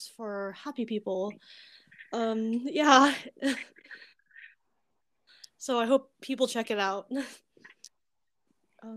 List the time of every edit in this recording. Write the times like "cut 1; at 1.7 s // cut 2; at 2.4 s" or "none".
none